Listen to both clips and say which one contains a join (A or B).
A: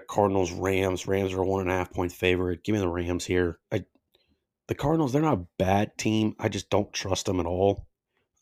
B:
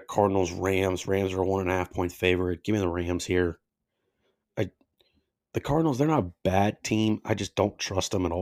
A